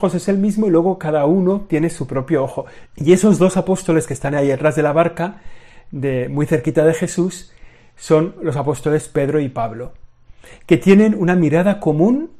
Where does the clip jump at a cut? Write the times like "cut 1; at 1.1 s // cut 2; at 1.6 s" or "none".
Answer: cut 1; at 2.9 s